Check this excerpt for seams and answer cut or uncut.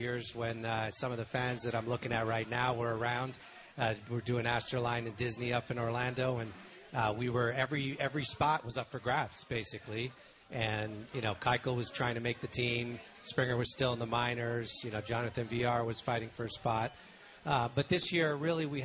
uncut